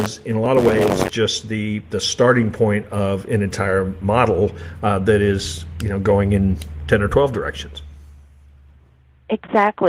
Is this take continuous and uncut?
yes; 0 cuts

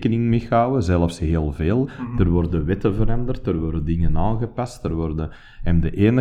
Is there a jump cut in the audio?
no; 0 cuts

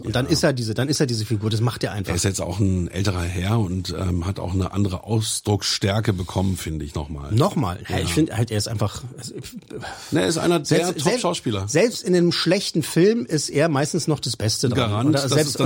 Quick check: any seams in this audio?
no; 0 cuts

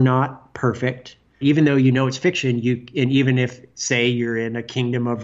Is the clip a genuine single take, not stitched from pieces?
no; 1 cut; at 1.4 s

